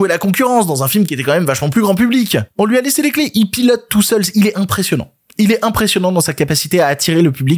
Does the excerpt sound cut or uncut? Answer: uncut